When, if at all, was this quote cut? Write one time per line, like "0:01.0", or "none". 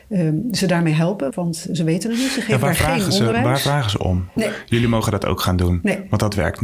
0:01.3
0:04.4